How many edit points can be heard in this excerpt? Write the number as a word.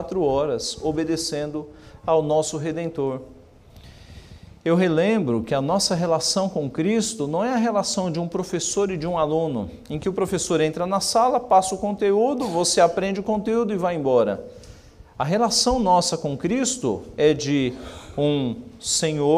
zero